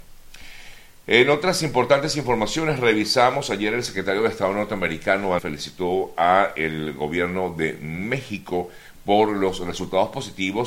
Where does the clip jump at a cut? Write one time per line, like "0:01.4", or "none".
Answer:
0:05.4